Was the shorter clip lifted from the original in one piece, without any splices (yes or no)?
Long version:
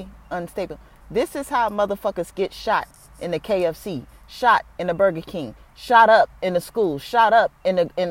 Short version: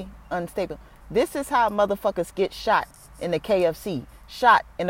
yes